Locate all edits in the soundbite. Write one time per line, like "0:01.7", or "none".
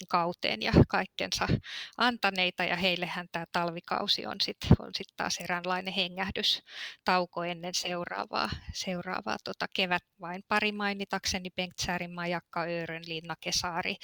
0:10.1

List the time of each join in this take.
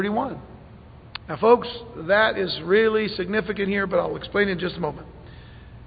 0:01.2

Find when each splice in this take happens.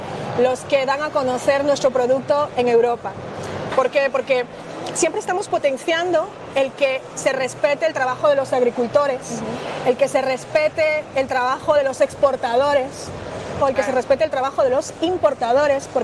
0:03.7
0:11.1
0:13.6

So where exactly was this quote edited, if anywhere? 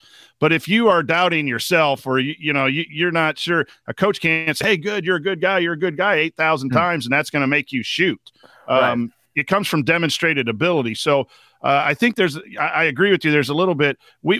none

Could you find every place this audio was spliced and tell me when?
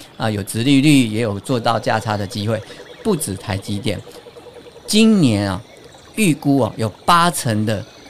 none

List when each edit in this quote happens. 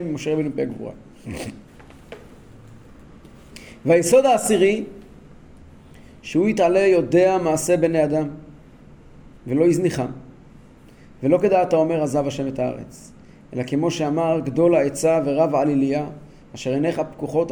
none

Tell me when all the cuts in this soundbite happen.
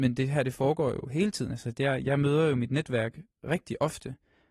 none

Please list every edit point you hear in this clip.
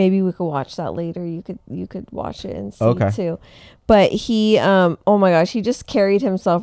none

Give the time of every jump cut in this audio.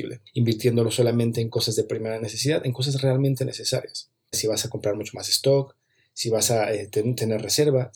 0:04.3

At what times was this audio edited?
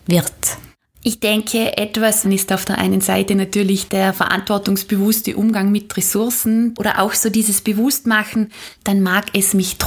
0:02.2
0:06.7
0:08.8

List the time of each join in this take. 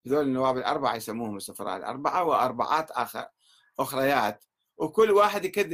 none

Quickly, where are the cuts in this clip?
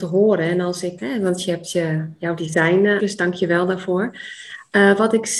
0:01.0
0:03.0

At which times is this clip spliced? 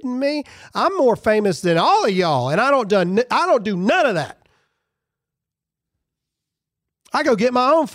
none

